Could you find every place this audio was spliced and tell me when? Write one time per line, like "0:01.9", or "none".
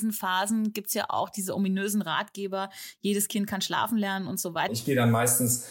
0:04.7